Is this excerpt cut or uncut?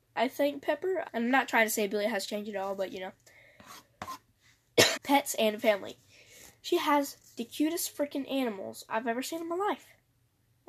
cut